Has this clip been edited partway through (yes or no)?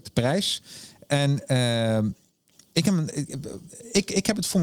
no